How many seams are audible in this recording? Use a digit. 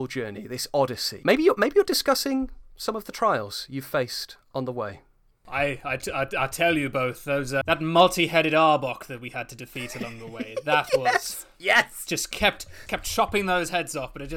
2